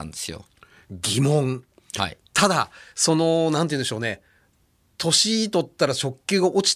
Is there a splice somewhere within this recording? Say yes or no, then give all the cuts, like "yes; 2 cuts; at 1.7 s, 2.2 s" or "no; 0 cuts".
no; 0 cuts